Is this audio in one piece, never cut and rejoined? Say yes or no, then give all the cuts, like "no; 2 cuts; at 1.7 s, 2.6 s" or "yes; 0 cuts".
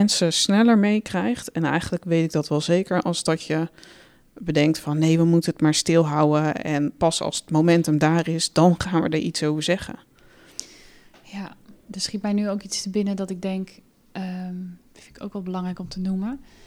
yes; 0 cuts